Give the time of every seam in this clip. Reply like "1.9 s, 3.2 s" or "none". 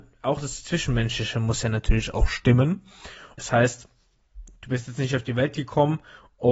3.4 s